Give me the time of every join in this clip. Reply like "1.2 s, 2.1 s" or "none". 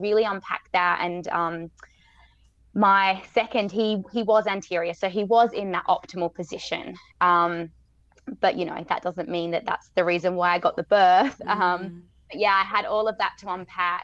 none

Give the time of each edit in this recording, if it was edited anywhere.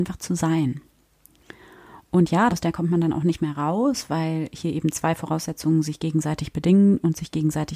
2.5 s

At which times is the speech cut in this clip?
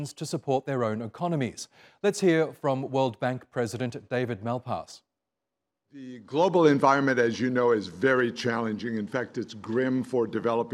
none

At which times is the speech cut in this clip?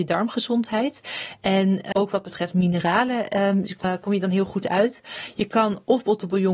1.9 s, 3.8 s

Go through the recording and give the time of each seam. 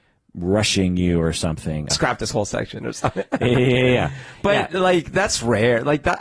1.9 s

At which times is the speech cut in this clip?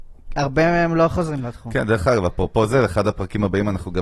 none

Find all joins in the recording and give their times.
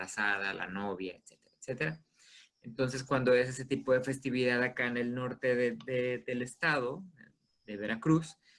1.2 s

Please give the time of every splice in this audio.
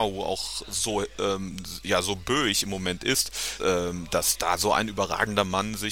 3.6 s

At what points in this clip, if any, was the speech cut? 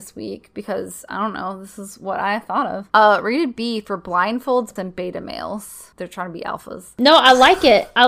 4.8 s, 5.9 s

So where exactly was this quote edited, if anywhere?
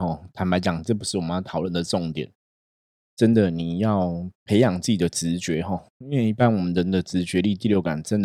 3.0 s

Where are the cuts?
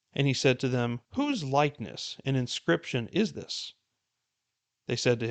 1.1 s

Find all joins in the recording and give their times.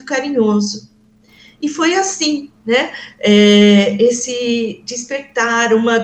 none

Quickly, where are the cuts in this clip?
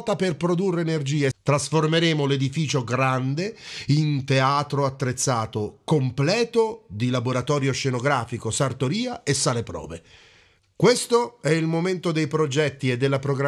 1.3 s, 10.6 s

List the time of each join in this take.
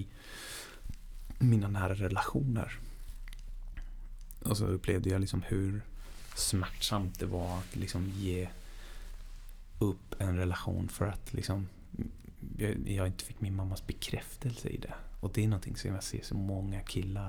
none

